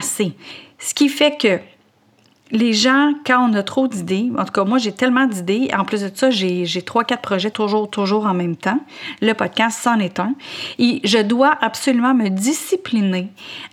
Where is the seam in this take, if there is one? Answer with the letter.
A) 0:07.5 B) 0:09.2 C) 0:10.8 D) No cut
A